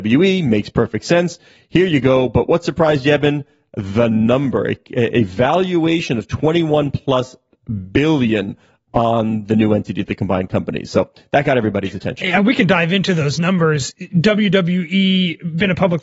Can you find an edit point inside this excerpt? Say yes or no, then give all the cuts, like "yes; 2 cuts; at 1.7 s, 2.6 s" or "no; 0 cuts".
no; 0 cuts